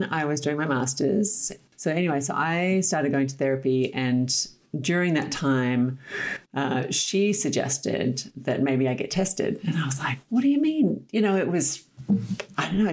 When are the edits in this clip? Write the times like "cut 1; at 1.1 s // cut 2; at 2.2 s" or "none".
none